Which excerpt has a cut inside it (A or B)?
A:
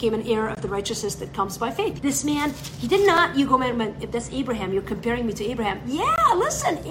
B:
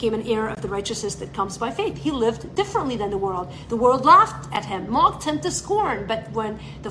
A